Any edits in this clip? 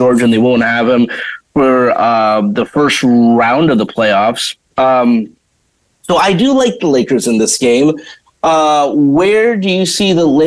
no; 0 cuts

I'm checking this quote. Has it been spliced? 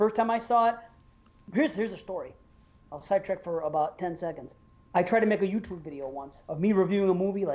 no; 0 cuts

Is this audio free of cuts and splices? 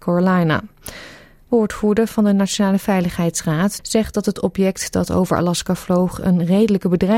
no; 1 cut; at 3.8 s

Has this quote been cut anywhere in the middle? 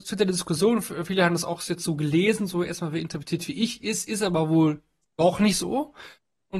no; 0 cuts

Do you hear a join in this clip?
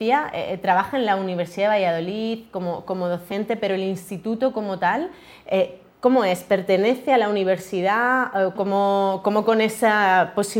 yes; 1 cut; at 8.5 s

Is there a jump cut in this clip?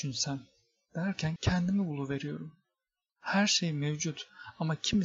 yes; 2 cuts; at 1.4 s, 3.1 s

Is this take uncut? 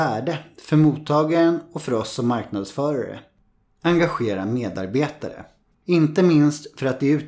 no; 1 cut; at 5.7 s

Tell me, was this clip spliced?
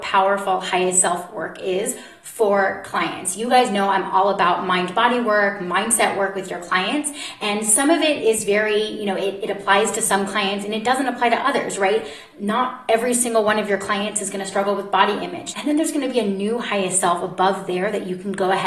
yes; 1 cut; at 15.5 s

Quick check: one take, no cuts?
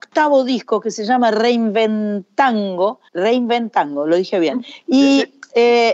no; 1 cut; at 3.1 s

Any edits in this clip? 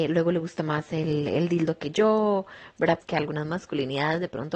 yes; 1 cut; at 3.0 s

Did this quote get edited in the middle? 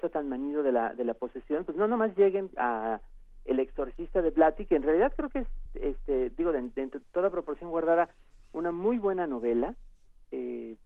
no; 0 cuts

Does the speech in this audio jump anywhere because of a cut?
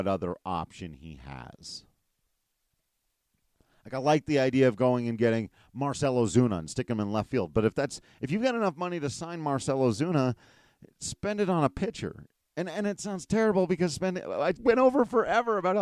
yes; 1 cut; at 14.5 s

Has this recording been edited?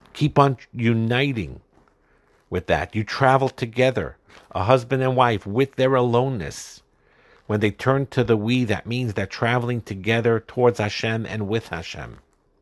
no; 0 cuts

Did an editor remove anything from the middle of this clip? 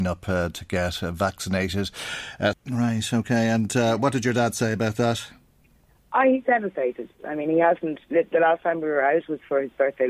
yes; 1 cut; at 2.5 s

